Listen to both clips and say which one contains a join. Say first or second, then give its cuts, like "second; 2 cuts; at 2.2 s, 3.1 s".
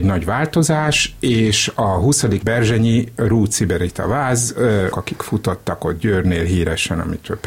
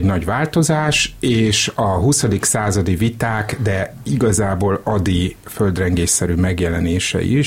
first; 2 cuts; at 2.4 s, 4.9 s